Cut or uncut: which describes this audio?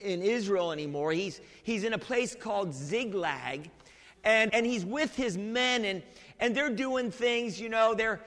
cut